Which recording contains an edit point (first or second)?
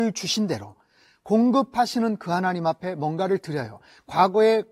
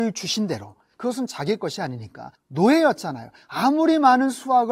second